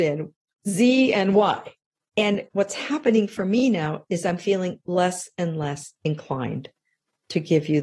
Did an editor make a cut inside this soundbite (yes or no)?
no